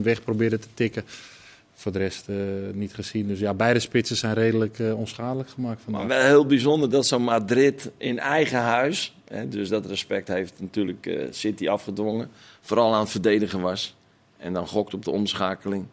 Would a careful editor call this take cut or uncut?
uncut